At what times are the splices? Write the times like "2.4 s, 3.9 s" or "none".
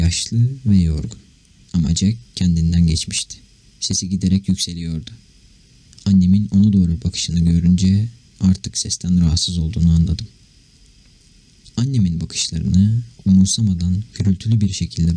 1.7 s